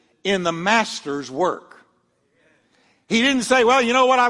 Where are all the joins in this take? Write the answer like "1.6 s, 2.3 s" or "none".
none